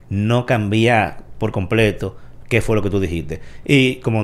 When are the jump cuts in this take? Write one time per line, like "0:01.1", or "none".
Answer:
none